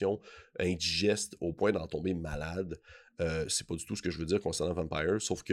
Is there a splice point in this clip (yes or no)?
no